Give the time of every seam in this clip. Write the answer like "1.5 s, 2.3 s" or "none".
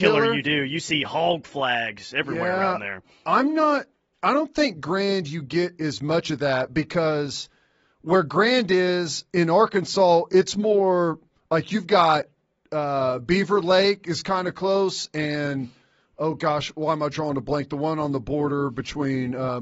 none